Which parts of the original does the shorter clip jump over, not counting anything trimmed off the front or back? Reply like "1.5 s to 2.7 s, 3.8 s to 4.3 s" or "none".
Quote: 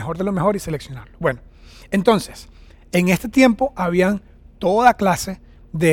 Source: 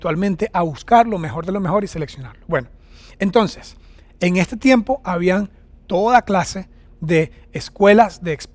none